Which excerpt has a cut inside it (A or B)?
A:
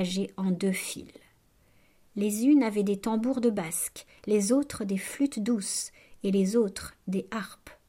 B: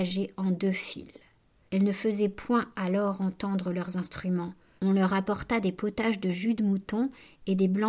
B